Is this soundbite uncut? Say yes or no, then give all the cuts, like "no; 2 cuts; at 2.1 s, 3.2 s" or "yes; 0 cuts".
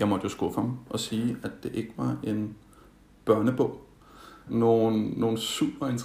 no; 1 cut; at 4.5 s